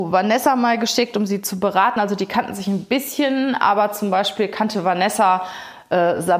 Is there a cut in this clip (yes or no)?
no